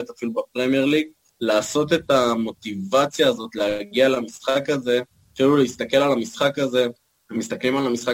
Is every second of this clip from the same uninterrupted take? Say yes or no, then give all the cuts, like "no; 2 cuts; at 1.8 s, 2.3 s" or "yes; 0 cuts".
yes; 0 cuts